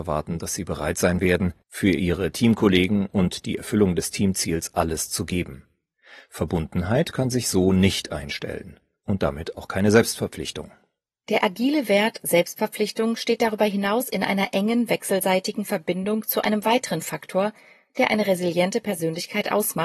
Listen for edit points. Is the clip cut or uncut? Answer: uncut